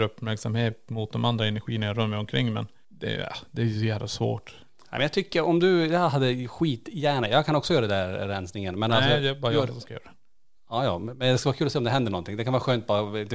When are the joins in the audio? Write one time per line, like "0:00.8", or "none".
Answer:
none